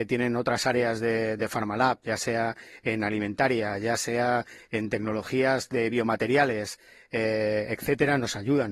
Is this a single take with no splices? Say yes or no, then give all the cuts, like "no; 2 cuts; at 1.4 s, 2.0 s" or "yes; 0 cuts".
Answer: yes; 0 cuts